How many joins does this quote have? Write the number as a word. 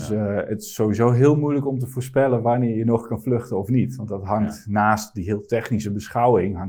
zero